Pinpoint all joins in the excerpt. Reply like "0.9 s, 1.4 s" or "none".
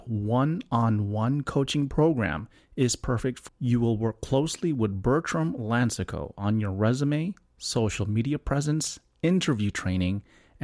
3.5 s